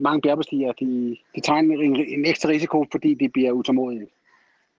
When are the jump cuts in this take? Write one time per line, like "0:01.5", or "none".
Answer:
0:01.2